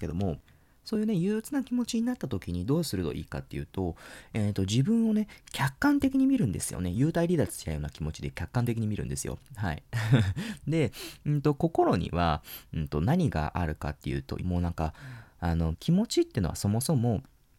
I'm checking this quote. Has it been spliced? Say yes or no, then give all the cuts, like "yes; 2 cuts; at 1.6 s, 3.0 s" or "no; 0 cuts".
yes; 2 cuts; at 14.4 s, 15.7 s